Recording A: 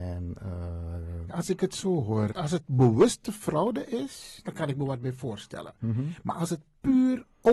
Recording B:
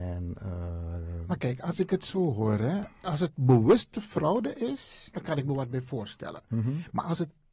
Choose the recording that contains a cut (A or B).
A